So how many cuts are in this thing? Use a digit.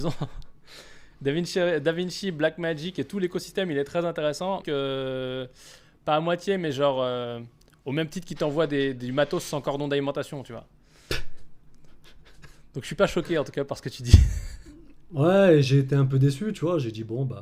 1